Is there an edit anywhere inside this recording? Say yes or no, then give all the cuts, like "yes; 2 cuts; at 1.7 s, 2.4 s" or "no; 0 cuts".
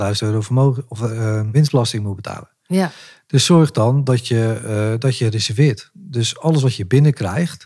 no; 0 cuts